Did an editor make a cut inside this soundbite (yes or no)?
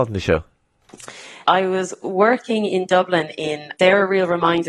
yes